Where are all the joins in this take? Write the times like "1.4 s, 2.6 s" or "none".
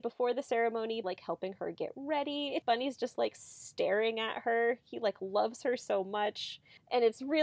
1.0 s